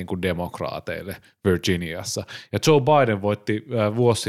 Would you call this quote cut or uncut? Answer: uncut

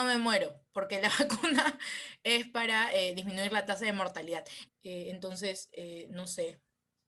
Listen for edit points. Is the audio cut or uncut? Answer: cut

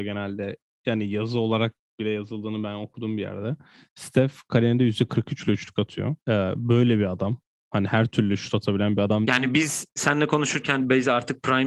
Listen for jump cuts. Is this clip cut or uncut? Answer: cut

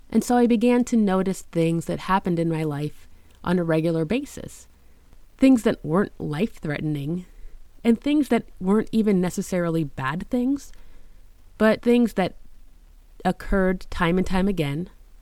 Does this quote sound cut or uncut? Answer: cut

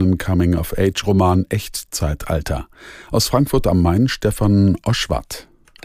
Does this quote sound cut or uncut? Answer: uncut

